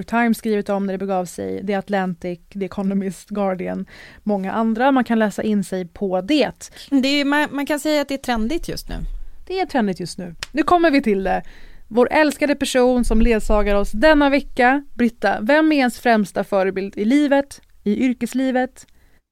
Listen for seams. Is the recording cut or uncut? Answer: uncut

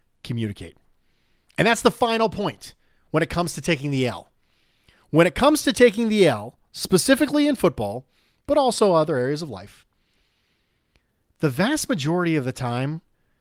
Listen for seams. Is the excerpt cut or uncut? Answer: uncut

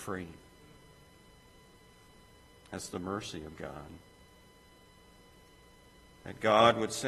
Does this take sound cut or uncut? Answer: cut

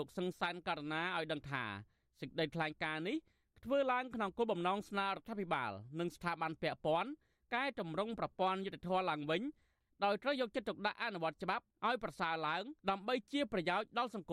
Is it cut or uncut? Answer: cut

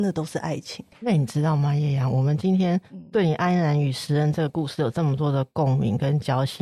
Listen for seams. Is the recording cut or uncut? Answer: uncut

